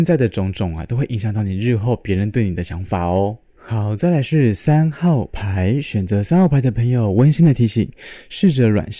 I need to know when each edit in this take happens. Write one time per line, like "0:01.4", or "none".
none